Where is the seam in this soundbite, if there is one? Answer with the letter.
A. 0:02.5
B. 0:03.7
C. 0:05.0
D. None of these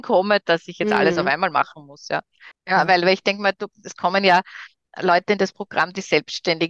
A